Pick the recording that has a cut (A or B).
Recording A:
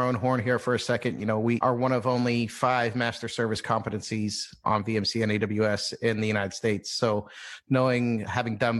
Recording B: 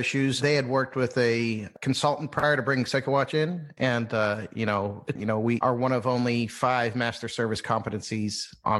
B